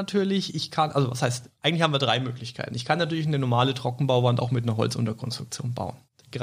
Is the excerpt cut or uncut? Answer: uncut